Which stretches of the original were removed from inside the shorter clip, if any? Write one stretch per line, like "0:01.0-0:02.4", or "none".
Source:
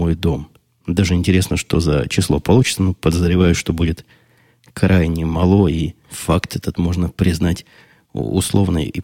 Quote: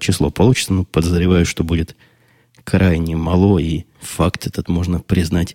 none